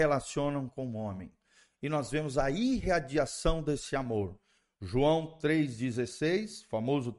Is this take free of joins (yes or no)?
yes